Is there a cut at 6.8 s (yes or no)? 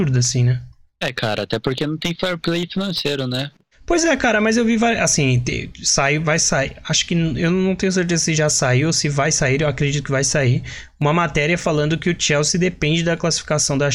no